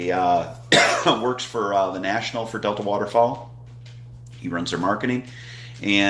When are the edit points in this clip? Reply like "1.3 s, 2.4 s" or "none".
none